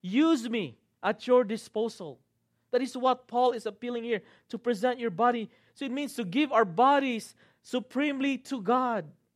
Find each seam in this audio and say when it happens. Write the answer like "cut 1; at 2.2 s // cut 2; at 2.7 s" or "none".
none